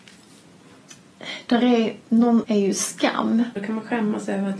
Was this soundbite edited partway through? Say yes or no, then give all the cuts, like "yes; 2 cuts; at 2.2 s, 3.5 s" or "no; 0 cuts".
yes; 2 cuts; at 2.4 s, 3.6 s